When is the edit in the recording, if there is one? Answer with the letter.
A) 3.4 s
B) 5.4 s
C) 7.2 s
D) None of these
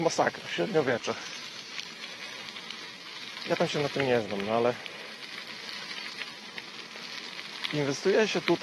A